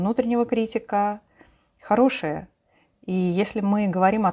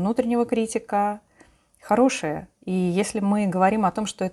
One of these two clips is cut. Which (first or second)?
second